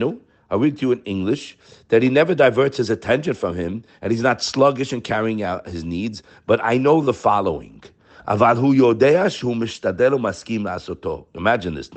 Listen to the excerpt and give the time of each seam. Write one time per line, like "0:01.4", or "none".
none